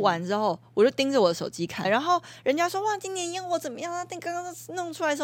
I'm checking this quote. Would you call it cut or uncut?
cut